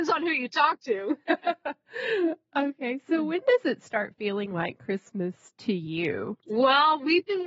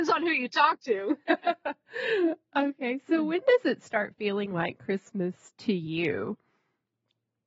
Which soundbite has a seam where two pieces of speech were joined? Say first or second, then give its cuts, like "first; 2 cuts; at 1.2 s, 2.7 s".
first; 1 cut; at 6.4 s